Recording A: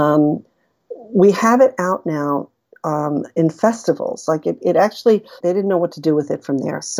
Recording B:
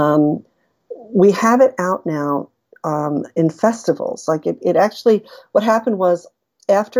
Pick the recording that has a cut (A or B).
A